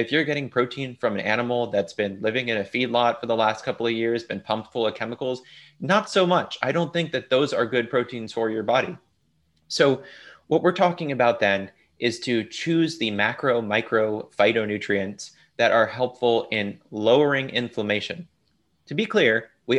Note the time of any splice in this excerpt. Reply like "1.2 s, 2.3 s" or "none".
none